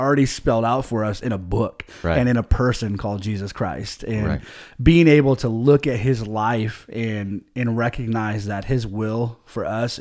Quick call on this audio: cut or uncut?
uncut